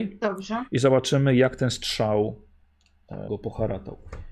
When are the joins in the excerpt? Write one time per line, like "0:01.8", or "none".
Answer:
0:03.3